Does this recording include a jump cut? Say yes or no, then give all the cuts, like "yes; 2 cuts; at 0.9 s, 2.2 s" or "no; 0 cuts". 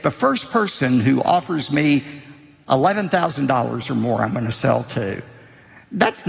no; 0 cuts